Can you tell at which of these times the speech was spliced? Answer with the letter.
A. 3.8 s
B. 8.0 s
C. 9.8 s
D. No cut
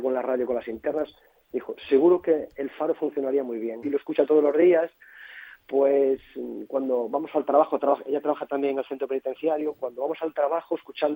A